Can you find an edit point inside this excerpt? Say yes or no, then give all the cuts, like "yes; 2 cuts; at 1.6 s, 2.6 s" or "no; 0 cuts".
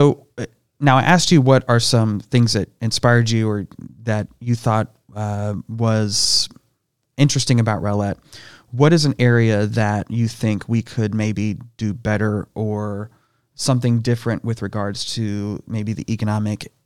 no; 0 cuts